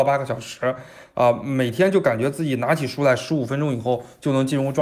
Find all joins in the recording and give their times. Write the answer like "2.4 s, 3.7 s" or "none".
none